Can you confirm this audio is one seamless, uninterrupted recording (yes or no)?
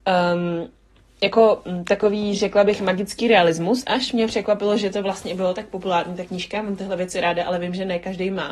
yes